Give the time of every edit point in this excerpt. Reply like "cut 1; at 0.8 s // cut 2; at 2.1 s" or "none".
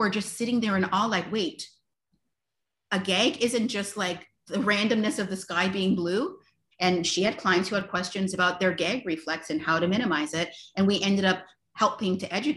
cut 1; at 6.7 s